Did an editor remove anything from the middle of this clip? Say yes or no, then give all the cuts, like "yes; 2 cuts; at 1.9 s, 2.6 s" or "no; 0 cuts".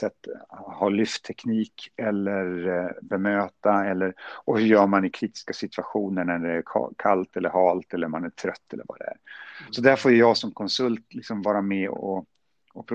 no; 0 cuts